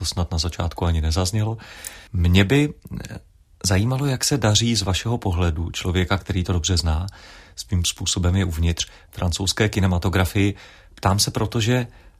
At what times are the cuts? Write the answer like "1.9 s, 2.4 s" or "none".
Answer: 2.1 s